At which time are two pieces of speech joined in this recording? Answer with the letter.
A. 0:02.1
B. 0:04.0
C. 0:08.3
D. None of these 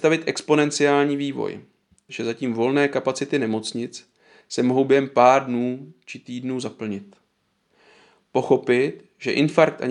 A